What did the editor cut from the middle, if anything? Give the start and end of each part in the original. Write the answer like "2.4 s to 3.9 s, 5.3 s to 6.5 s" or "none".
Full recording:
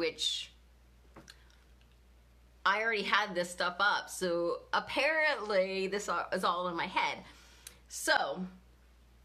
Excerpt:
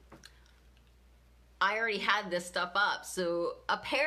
none